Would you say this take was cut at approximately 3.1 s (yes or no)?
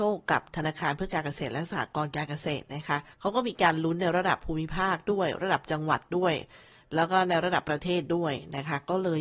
yes